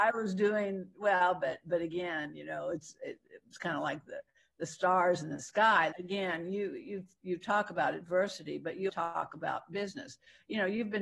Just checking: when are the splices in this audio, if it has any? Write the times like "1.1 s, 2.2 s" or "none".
5.9 s, 8.9 s